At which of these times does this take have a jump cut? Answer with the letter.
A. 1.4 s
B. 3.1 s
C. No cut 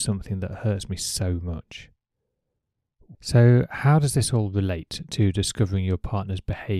B